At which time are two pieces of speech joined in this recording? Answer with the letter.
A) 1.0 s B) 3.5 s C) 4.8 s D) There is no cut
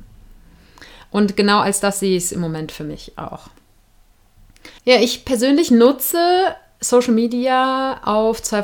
C